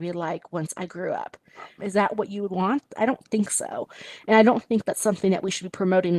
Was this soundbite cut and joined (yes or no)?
yes